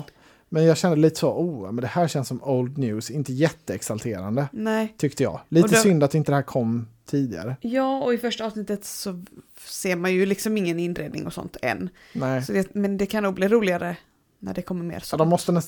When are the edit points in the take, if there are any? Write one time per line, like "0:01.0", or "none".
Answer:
none